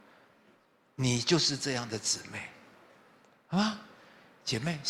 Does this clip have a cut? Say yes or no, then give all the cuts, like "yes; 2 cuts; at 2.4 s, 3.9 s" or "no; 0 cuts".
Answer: no; 0 cuts